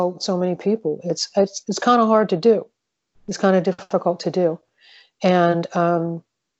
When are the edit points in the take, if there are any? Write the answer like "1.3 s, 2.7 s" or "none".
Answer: none